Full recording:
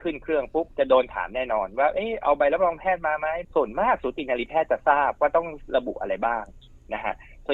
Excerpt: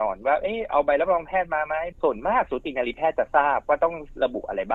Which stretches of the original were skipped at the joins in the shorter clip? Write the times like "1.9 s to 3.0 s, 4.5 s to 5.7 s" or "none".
none